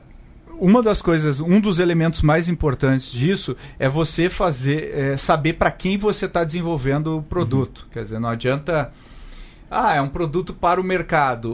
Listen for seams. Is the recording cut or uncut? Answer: uncut